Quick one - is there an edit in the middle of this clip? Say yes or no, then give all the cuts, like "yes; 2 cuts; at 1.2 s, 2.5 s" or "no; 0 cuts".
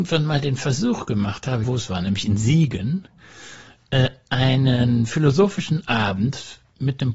yes; 1 cut; at 1.6 s